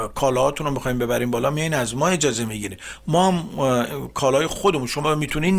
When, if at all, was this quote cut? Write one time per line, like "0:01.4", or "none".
0:04.5